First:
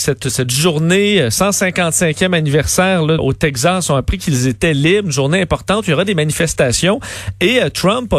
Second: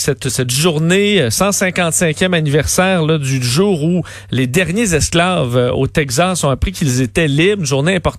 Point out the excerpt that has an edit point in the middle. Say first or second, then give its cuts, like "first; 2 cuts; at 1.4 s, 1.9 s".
first; 1 cut; at 3.2 s